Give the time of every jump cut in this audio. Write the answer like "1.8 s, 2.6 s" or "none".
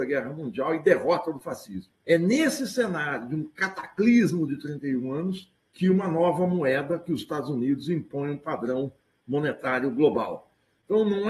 2.0 s, 5.6 s